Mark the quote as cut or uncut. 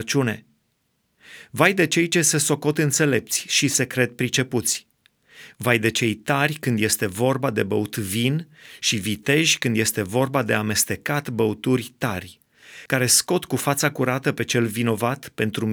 uncut